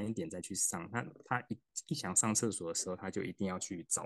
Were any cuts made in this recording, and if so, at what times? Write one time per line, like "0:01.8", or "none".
none